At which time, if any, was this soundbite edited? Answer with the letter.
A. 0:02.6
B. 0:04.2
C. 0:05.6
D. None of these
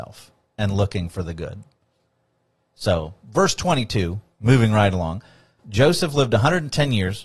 C